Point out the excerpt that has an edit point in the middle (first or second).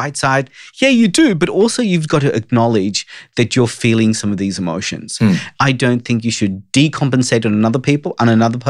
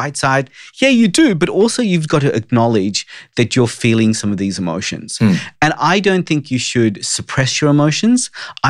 first